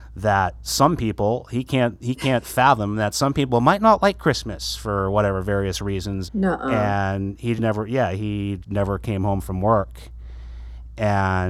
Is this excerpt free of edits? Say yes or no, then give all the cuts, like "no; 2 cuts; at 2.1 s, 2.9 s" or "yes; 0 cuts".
no; 3 cuts; at 6.3 s, 7.6 s, 8.6 s